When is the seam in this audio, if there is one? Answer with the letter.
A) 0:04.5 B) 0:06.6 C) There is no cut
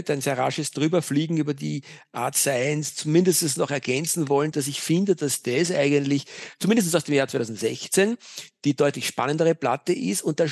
A